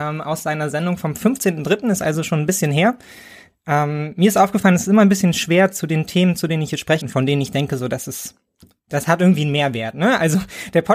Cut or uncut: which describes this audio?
cut